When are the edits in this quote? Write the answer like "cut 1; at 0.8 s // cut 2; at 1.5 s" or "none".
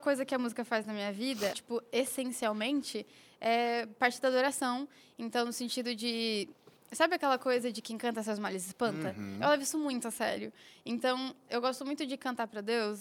cut 1; at 1.5 s // cut 2; at 11.5 s